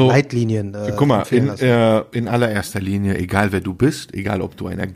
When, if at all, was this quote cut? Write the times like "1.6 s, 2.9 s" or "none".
none